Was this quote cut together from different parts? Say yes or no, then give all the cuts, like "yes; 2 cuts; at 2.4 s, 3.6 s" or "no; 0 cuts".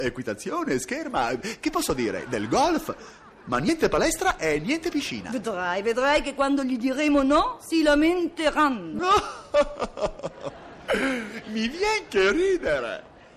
no; 0 cuts